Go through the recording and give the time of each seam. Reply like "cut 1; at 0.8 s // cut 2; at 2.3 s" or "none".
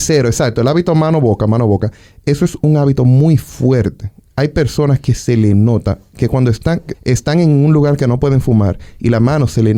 cut 1; at 6.9 s